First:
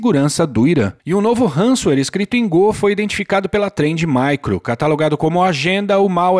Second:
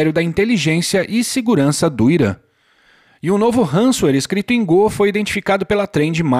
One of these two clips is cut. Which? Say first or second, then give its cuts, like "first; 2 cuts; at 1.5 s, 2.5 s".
first; 1 cut; at 1.0 s